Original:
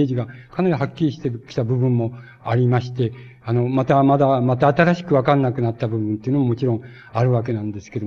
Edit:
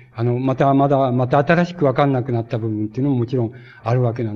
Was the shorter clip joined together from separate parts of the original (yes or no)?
no